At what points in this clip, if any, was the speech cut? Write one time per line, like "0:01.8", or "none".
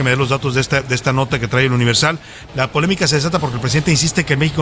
0:02.5